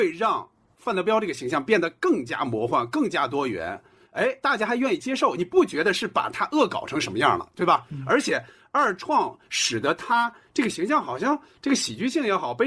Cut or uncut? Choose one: uncut